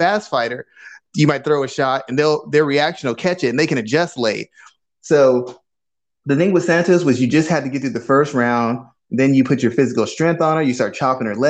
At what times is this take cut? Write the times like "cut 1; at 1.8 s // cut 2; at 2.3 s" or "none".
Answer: cut 1; at 4.8 s